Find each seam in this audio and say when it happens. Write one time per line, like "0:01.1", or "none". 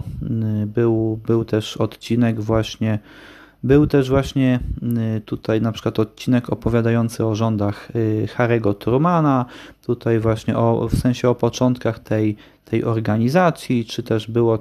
0:09.7